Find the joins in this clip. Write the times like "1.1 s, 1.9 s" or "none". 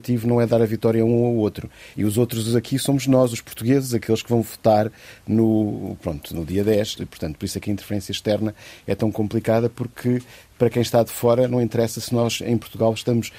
1.9 s, 7.0 s